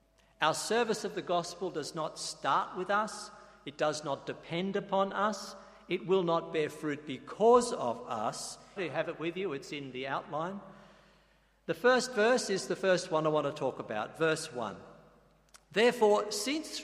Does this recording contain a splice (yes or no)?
yes